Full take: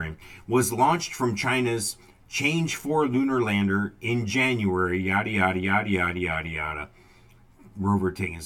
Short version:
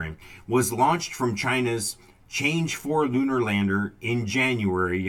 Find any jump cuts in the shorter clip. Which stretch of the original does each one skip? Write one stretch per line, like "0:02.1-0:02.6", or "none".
none